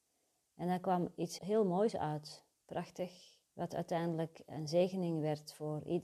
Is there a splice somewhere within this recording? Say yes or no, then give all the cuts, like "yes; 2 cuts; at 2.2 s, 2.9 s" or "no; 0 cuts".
yes; 2 cuts; at 1.4 s, 3.5 s